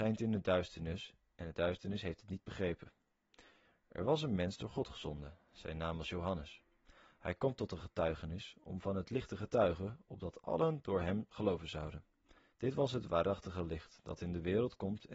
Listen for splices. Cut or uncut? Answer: cut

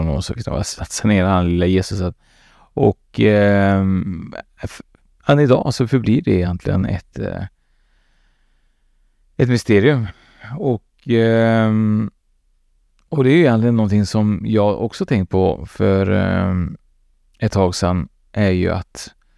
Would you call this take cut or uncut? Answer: uncut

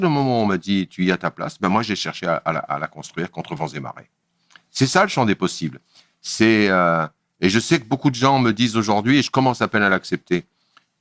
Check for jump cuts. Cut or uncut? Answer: uncut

